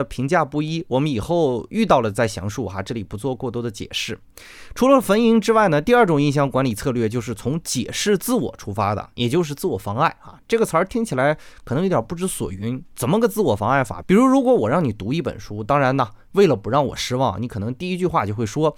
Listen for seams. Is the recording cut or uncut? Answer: cut